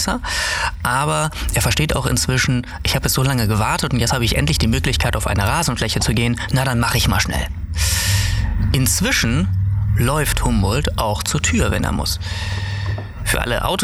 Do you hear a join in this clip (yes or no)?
no